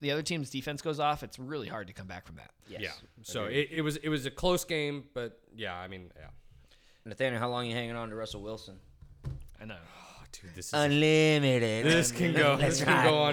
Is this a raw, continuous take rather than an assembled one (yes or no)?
yes